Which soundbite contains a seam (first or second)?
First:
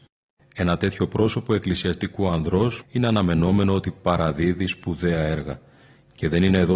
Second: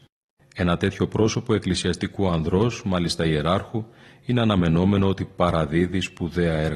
first